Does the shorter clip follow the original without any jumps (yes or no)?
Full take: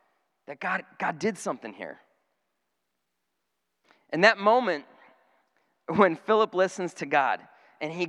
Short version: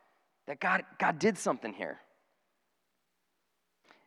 yes